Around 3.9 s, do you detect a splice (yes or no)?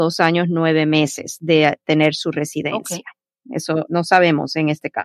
yes